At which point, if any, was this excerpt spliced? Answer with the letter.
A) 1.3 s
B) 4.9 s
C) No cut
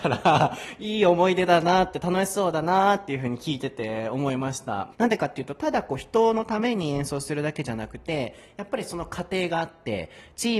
B